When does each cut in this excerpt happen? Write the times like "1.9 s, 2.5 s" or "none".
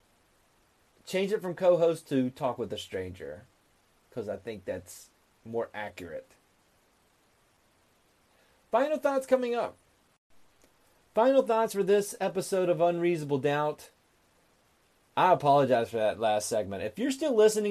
none